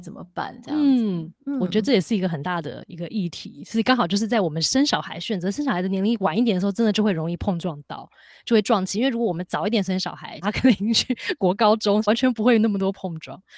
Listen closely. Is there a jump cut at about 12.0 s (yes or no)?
yes